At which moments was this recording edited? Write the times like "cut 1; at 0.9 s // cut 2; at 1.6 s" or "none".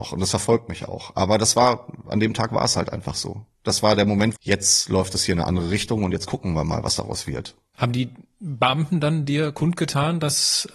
cut 1; at 4.3 s // cut 2; at 7.7 s